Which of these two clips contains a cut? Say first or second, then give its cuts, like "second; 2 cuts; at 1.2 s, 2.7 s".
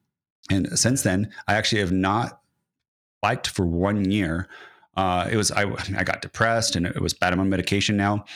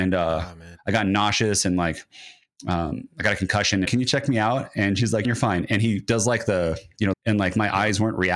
second; 3 cuts; at 3.8 s, 5.2 s, 7.1 s